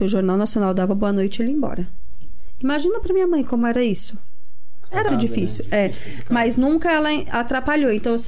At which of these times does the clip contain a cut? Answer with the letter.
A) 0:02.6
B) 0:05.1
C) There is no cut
B